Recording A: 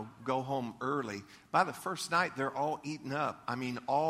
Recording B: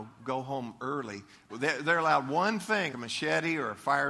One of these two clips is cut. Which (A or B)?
B